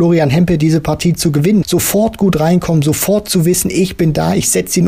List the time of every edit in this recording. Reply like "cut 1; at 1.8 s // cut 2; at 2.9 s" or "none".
cut 1; at 1.6 s